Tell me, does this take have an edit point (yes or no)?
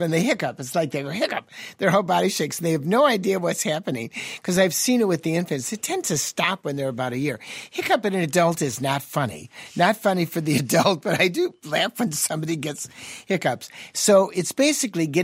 no